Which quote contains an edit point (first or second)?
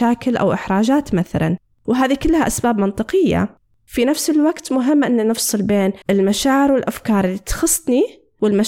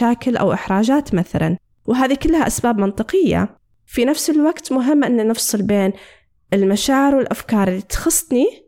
first